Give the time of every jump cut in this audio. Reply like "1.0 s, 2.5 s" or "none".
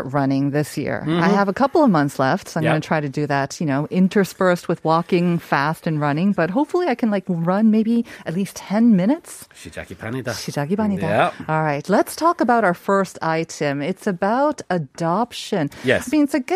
none